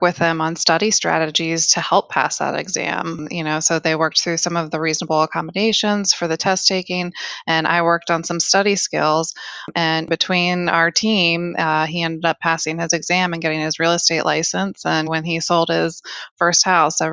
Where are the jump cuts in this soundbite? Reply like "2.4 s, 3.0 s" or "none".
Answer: none